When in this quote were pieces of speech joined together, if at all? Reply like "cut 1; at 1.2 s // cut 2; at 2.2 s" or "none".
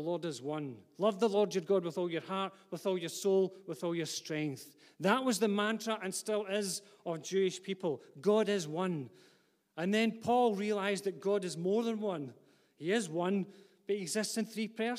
none